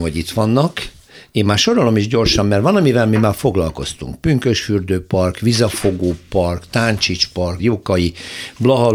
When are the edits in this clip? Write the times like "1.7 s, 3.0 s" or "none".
7.6 s